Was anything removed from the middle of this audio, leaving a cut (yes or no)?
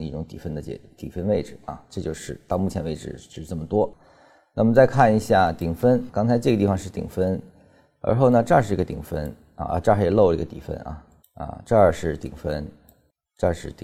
yes